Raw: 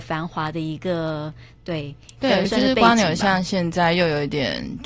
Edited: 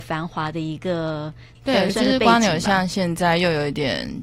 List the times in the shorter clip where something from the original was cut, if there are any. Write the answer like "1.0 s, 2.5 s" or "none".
1.6 s